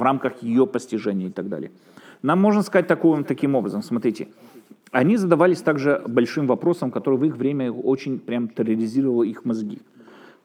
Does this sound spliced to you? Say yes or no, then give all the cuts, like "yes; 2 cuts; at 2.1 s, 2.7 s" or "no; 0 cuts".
no; 0 cuts